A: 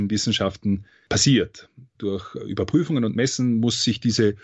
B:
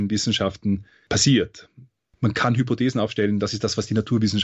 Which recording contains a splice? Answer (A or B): A